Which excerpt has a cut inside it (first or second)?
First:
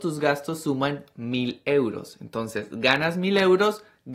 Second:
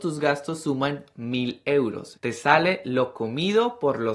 second